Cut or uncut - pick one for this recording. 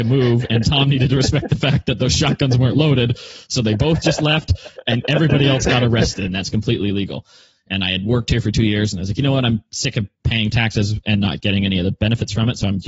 cut